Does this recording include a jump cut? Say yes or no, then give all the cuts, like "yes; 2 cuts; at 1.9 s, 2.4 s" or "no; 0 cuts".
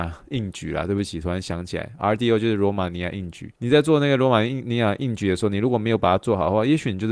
yes; 1 cut; at 3.6 s